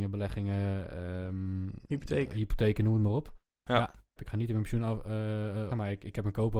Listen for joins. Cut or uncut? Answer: cut